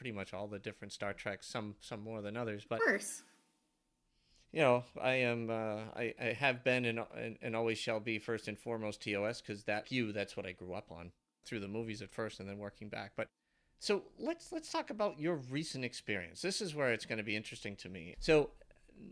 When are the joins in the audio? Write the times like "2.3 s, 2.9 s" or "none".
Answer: 9.8 s, 11.4 s, 18.1 s